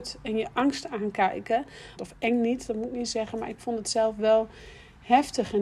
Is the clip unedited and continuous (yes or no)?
no